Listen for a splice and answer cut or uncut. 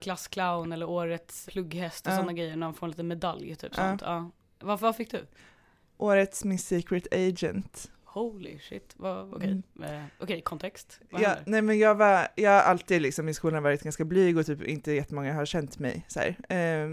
cut